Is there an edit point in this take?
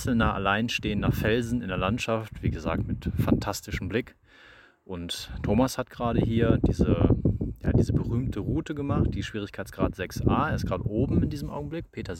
no; 0 cuts

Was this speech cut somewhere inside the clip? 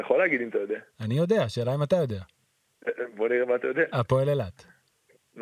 no; 0 cuts

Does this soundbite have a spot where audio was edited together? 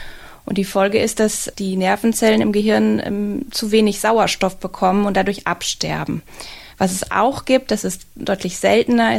no; 0 cuts

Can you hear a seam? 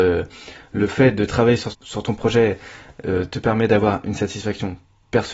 yes; 1 cut; at 1.7 s

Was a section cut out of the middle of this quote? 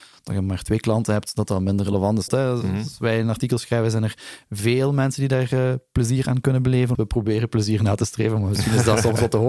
yes; 2 cuts; at 2.3 s, 6.9 s

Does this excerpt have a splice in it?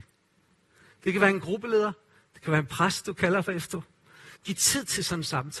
yes; 1 cut; at 4.4 s

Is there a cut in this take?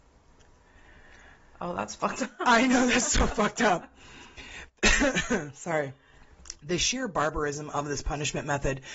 no; 0 cuts

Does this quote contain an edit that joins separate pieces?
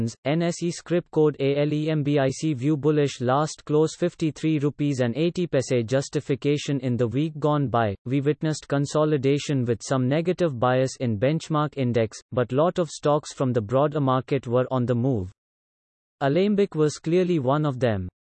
no; 0 cuts

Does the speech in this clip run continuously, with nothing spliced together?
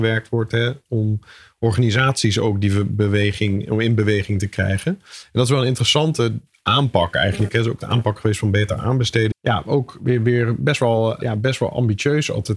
no; 2 cuts; at 9.3 s, 11.2 s

